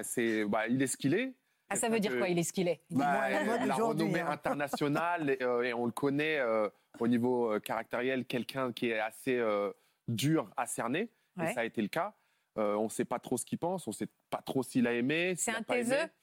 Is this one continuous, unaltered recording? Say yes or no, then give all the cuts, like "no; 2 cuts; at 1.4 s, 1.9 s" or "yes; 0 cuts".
no; 2 cuts; at 1.7 s, 5.4 s